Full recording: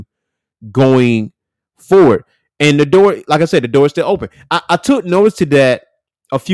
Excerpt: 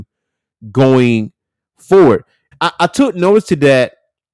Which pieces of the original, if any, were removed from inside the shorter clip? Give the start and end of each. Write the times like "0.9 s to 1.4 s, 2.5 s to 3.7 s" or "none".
2.5 s to 4.4 s

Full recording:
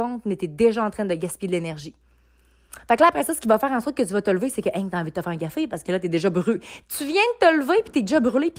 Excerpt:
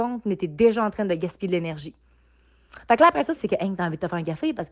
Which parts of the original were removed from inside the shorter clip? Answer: 3.4 s to 4.5 s

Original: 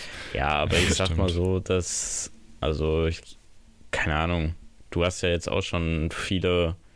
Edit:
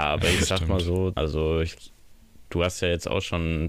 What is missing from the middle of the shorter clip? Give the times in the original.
1.6 s to 2.6 s, 3.9 s to 4.8 s

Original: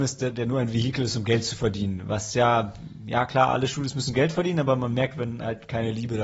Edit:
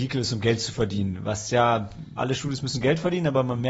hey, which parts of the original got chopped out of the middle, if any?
3.0 s to 3.5 s

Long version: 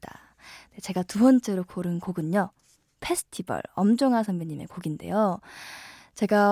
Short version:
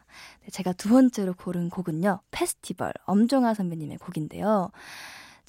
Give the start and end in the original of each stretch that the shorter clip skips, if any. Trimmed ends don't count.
2.5 s to 2.9 s

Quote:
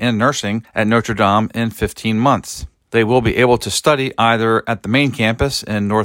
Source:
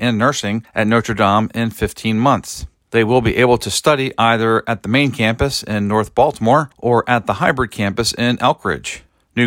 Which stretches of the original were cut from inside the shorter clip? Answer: none

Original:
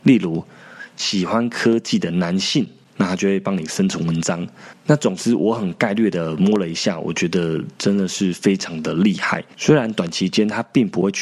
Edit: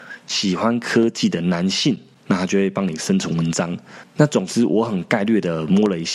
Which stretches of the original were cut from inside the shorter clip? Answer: none

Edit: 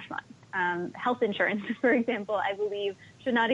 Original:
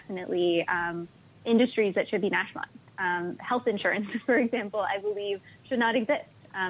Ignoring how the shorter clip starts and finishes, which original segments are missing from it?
none

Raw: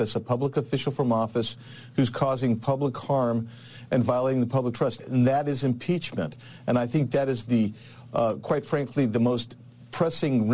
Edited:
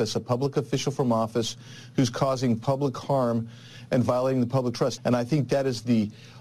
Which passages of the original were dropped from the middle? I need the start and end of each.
5.0 s to 6.6 s

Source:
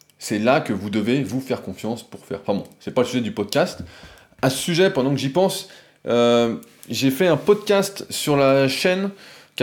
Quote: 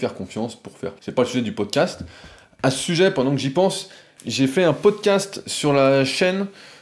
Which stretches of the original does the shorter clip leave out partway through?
2.5 s to 2.8 s, 6.0 s to 6.8 s

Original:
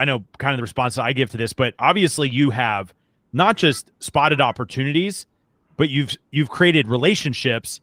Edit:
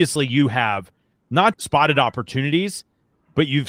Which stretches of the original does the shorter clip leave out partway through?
3.6 s to 4.0 s

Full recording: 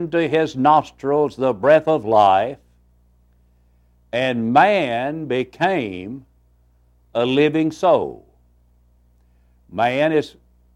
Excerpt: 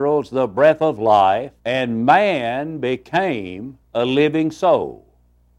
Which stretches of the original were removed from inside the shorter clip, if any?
2.6 s to 4.1 s, 6.3 s to 7.0 s

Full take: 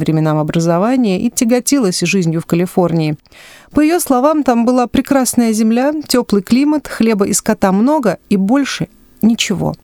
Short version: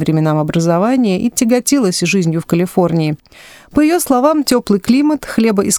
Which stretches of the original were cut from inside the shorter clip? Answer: 4.4 s to 6.1 s

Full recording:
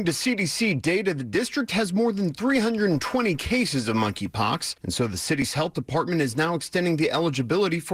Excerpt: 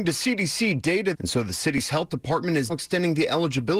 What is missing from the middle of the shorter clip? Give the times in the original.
1.1 s to 4.8 s, 6.3 s to 6.5 s

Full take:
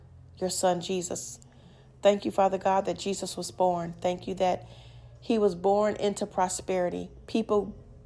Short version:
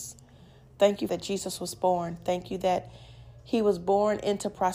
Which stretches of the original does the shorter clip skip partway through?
2.3 s to 2.9 s

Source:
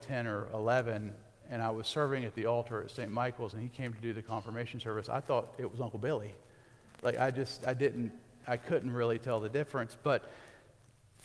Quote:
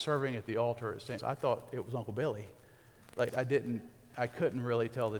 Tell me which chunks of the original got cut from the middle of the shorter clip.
3.1 s to 5.0 s, 7.1 s to 7.6 s

